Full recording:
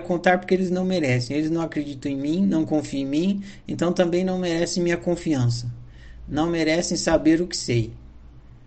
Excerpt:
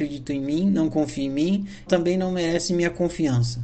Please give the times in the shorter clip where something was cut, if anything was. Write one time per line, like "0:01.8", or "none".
0:01.9